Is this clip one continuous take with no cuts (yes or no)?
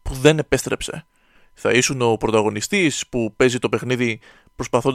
no